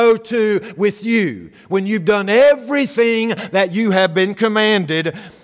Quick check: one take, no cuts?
yes; 0 cuts

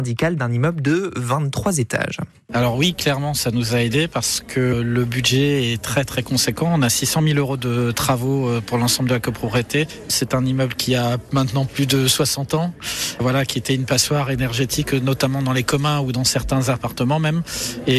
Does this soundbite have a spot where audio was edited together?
no; 0 cuts

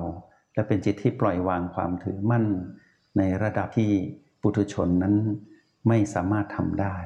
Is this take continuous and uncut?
yes; 0 cuts

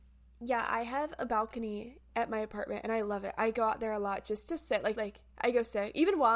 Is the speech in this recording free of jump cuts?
no; 1 cut; at 4.9 s

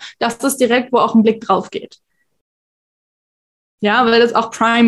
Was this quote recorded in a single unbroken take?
yes; 0 cuts

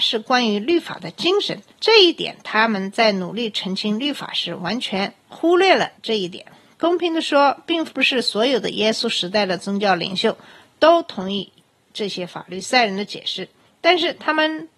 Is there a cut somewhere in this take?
no; 0 cuts

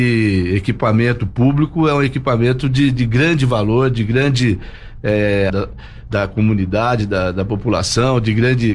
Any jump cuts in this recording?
yes; 1 cut; at 5.5 s

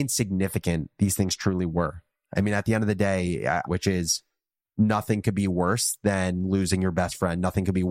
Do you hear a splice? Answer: yes; 1 cut; at 3.7 s

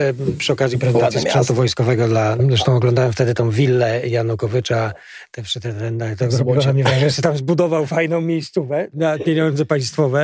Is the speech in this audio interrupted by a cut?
yes; 1 cut; at 2.4 s

